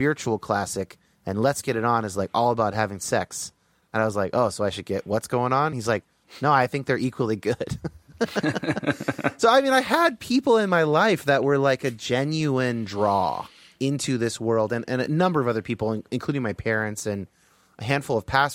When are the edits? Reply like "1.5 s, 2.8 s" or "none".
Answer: none